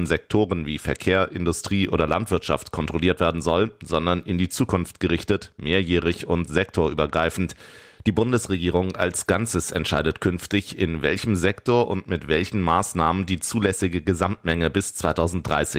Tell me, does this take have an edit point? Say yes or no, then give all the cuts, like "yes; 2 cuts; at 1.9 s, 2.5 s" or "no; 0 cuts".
no; 0 cuts